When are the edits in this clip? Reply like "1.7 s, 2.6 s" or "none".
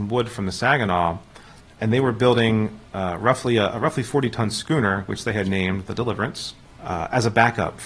none